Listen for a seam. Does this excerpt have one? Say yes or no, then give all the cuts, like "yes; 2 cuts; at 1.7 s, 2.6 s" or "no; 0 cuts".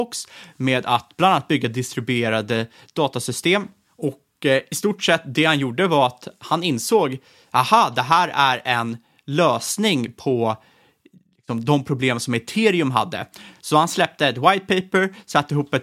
no; 0 cuts